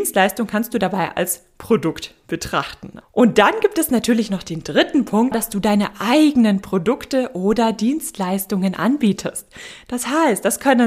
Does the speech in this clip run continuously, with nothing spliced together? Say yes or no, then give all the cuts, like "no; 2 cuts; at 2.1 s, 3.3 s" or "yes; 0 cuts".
no; 2 cuts; at 3.0 s, 5.3 s